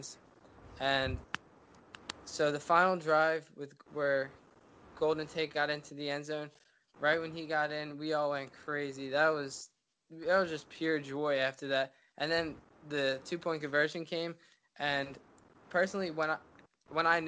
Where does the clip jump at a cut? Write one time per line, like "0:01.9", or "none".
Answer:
none